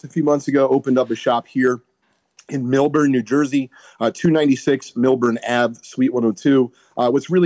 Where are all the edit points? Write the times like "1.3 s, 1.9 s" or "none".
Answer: none